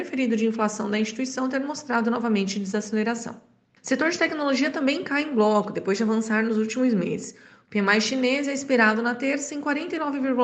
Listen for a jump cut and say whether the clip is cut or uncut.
cut